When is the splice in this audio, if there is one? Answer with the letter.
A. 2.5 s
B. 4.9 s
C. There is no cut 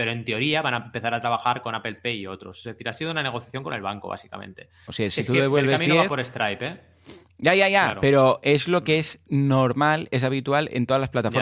B